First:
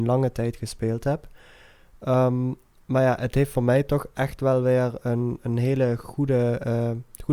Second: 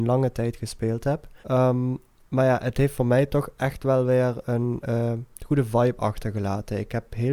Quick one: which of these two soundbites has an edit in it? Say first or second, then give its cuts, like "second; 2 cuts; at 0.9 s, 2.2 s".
second; 2 cuts; at 1.4 s, 4.8 s